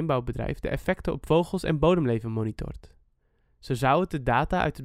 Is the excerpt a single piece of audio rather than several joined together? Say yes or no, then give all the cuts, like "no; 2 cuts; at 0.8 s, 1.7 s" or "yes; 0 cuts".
yes; 0 cuts